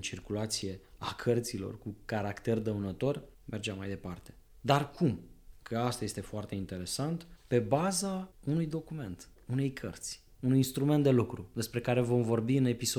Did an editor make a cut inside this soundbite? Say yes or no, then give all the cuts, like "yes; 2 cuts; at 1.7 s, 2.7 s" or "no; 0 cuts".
no; 0 cuts